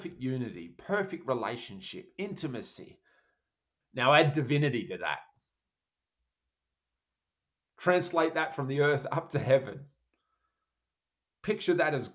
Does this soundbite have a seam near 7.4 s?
no; 1 cut; at 3.8 s

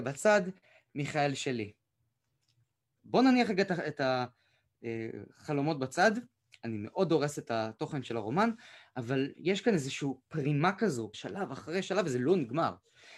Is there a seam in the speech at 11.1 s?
yes; 2 cuts; at 3.0 s, 11.1 s

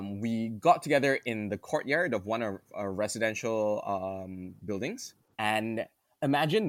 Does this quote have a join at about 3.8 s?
no; 1 cut; at 5.3 s

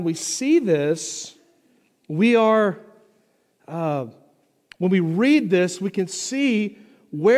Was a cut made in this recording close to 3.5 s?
no; 0 cuts

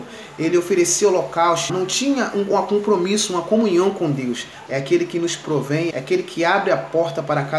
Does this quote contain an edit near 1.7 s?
yes; 3 cuts; at 1.7 s, 4.7 s, 5.9 s

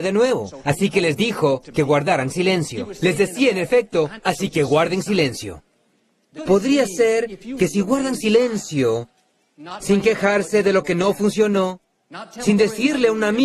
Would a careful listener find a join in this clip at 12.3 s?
no; 3 cuts; at 4.2 s, 6.4 s, 9.8 s

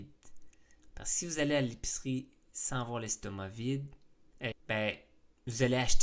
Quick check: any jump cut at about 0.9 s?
yes; 2 cuts; at 0.9 s, 4.5 s

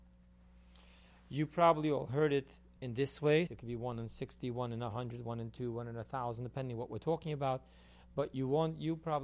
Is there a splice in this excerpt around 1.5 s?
no; 1 cut; at 3.5 s

